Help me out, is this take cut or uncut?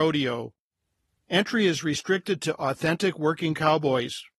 uncut